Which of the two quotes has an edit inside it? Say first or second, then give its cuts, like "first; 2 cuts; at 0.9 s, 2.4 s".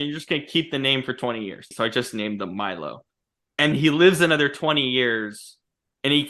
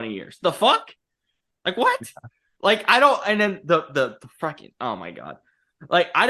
first; 2 cuts; at 1.7 s, 3.7 s